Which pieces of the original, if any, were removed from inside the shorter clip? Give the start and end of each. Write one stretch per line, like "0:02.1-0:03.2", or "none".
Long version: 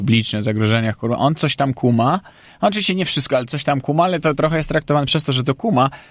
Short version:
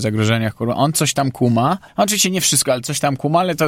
0:02.3-0:02.5